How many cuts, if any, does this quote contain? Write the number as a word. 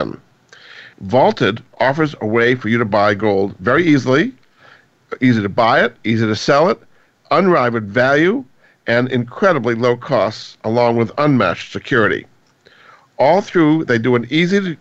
one